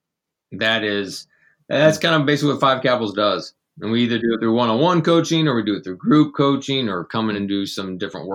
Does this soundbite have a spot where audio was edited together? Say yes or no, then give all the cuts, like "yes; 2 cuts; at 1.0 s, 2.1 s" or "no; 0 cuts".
no; 0 cuts